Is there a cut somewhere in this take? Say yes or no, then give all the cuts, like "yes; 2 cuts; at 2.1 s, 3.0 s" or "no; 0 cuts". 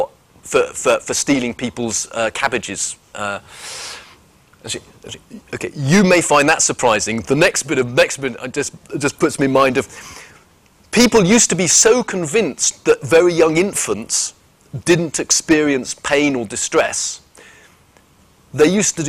yes; 1 cut; at 3.1 s